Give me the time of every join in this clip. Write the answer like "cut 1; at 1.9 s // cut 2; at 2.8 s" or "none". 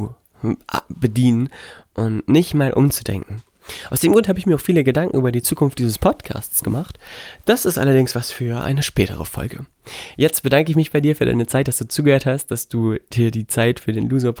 none